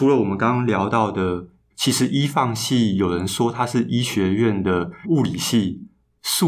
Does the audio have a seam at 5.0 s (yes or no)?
yes